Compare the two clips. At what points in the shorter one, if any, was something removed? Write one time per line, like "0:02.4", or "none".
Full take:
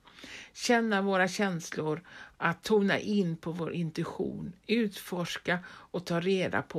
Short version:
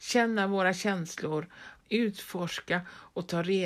0:01.8